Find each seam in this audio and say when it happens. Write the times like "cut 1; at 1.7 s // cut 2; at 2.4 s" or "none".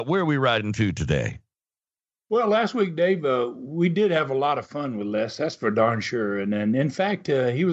none